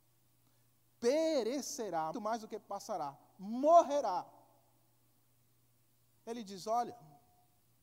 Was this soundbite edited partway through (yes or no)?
yes